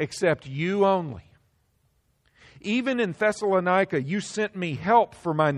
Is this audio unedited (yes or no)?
yes